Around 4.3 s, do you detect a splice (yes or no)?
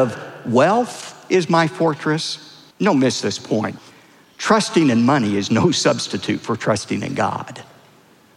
no